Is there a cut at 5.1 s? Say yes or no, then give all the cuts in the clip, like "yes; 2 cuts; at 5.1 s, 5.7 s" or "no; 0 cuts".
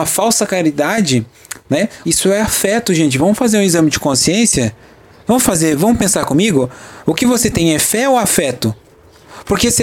no; 1 cut; at 2.0 s